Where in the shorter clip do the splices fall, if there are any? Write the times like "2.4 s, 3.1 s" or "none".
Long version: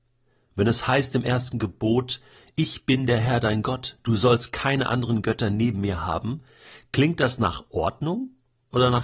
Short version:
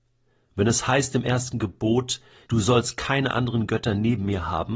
2.5 s